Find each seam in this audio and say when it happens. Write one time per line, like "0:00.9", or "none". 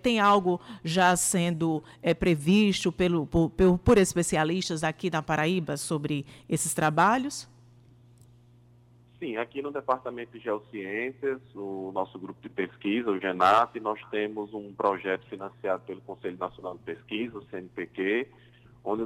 0:03.3